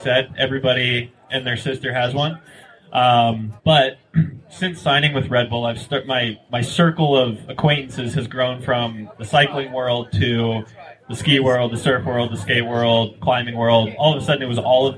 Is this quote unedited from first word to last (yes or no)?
no